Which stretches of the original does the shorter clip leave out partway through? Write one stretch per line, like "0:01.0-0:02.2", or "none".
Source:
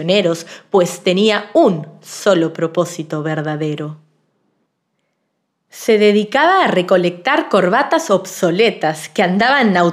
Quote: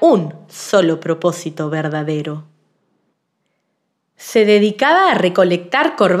none